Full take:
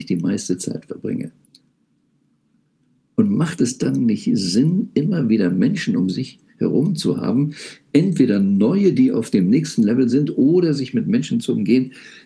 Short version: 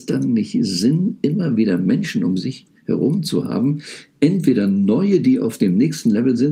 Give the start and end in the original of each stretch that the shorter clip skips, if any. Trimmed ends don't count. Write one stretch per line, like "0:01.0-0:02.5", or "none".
none